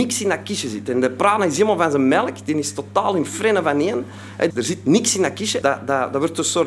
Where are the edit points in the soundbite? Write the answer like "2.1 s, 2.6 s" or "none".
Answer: 4.5 s, 5.6 s